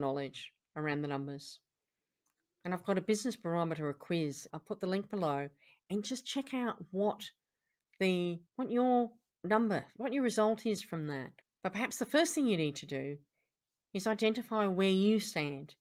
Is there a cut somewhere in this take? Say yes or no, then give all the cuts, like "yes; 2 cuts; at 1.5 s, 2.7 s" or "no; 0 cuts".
yes; 3 cuts; at 4.5 s, 8.5 s, 11.4 s